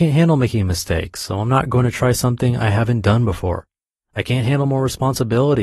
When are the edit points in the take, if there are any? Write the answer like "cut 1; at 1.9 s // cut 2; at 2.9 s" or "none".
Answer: none